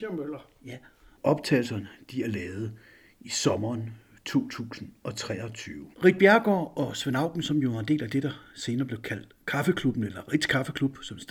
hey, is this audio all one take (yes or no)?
no